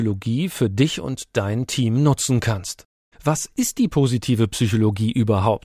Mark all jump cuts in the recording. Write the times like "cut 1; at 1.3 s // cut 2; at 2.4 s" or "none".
cut 1; at 3.1 s